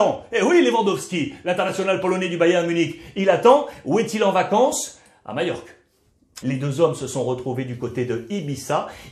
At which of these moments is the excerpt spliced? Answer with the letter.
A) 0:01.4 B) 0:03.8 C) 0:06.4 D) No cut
C